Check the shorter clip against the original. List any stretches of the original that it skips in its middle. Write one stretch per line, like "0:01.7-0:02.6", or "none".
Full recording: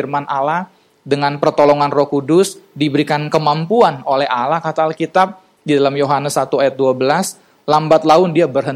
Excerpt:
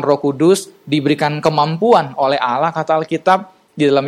none